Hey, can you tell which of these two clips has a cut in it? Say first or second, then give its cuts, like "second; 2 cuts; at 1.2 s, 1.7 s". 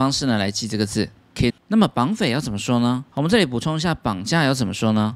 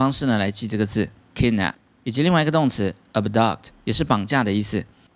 first; 2 cuts; at 1.5 s, 3.1 s